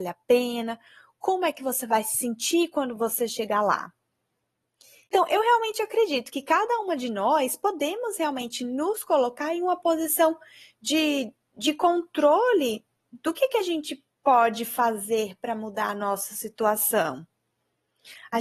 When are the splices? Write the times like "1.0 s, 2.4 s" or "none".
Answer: 5.1 s